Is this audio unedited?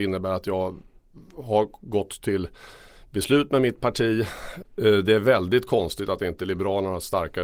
no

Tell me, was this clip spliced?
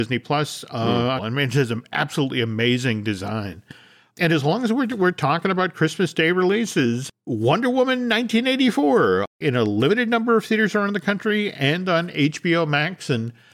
yes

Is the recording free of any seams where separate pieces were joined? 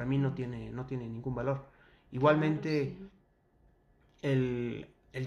yes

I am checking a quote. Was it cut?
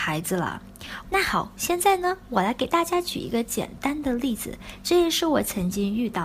yes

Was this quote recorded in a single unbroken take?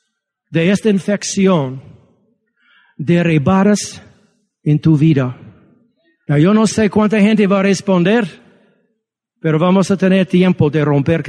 yes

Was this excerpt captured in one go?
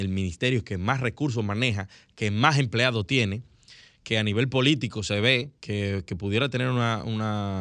no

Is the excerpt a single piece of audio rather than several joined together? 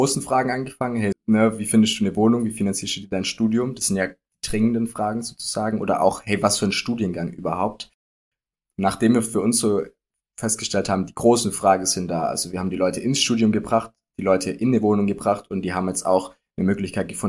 no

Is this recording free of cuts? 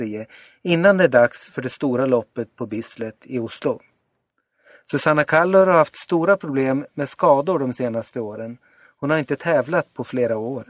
yes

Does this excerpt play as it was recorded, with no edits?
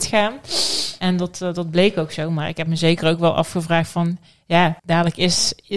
no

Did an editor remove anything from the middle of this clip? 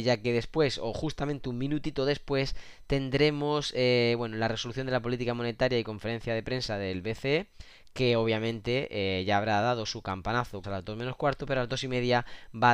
yes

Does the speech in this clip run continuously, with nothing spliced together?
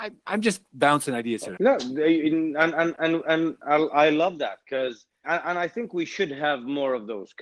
no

